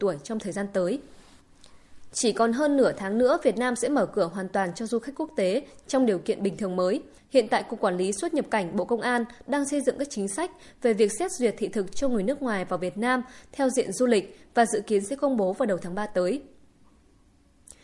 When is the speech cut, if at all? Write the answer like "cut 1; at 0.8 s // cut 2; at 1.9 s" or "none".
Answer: cut 1; at 7.2 s